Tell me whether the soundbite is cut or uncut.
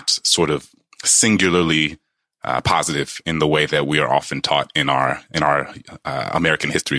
uncut